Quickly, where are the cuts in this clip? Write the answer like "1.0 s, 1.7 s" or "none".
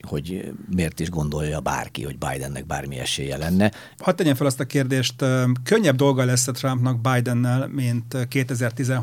3.9 s